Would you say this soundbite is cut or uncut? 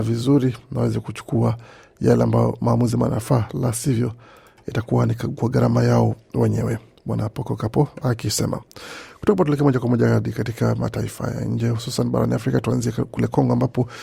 uncut